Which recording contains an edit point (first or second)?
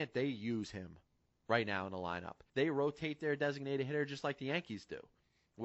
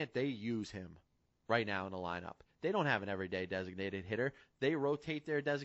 first